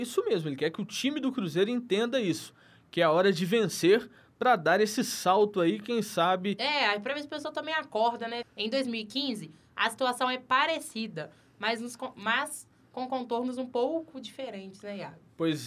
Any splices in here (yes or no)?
yes